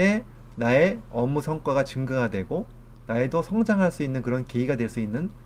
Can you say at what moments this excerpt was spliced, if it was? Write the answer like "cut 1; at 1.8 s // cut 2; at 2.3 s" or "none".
cut 1; at 3.0 s